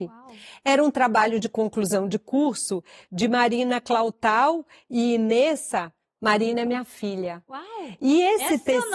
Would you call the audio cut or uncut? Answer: uncut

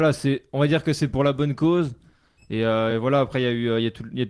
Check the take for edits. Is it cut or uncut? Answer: uncut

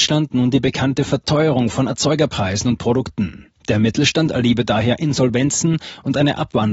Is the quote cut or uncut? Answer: uncut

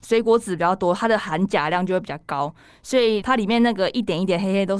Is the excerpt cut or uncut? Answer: cut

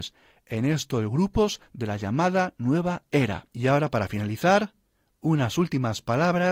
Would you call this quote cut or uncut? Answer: cut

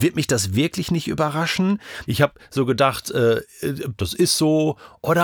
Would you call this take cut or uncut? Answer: cut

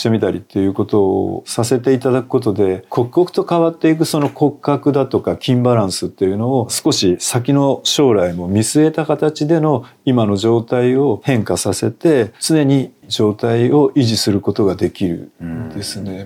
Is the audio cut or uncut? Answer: cut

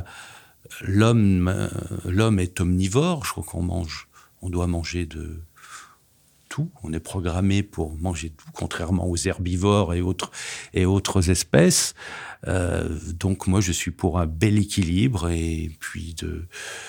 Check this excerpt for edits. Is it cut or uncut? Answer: uncut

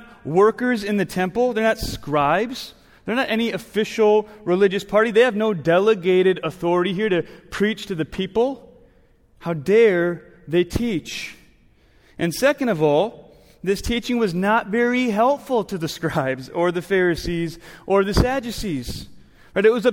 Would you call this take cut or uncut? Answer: uncut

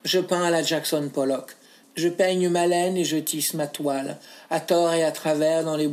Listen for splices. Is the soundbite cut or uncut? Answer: cut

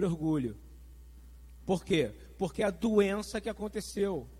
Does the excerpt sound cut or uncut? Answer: uncut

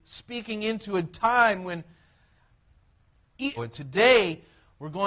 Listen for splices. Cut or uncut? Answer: cut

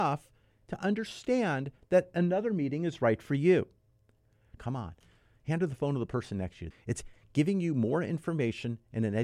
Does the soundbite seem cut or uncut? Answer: cut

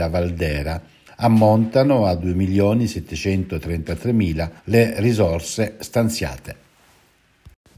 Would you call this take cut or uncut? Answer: cut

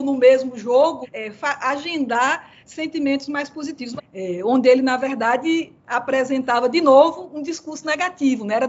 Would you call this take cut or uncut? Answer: cut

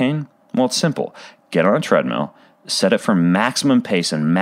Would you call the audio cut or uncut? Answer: uncut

